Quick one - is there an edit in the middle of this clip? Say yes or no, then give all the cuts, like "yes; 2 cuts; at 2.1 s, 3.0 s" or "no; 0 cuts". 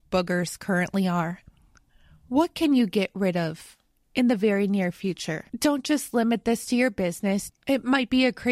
yes; 2 cuts; at 5.5 s, 7.5 s